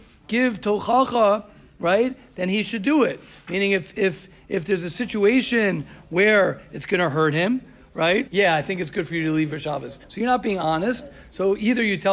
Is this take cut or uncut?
cut